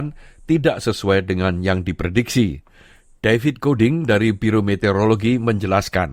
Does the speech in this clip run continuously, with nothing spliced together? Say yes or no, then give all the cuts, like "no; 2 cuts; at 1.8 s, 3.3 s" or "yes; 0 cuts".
yes; 0 cuts